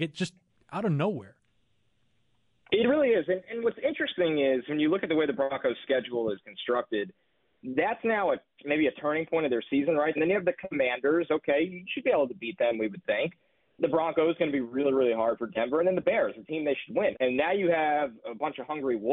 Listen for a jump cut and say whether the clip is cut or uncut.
cut